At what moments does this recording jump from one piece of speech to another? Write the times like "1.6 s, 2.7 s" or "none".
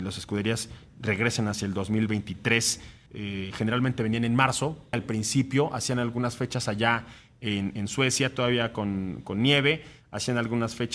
3.1 s, 4.9 s

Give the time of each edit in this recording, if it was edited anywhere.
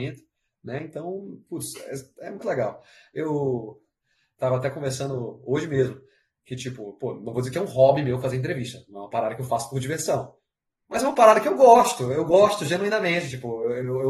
2.4 s

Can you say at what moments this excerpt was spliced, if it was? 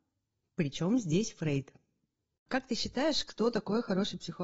2.4 s

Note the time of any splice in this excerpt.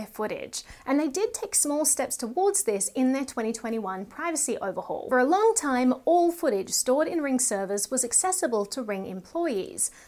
none

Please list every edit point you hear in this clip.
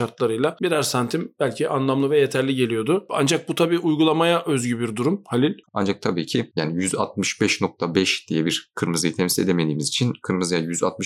5.6 s

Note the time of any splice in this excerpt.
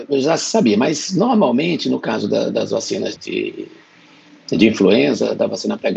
3.2 s

